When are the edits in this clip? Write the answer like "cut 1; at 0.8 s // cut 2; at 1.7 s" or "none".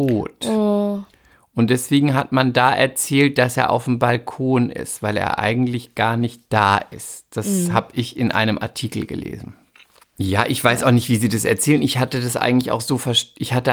cut 1; at 10.0 s